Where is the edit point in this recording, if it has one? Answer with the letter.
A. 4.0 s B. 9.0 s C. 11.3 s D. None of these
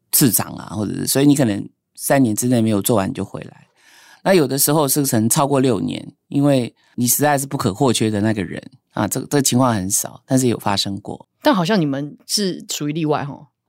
D